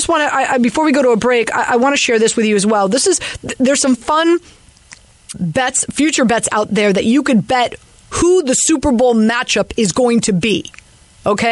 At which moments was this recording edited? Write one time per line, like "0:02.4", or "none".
0:05.3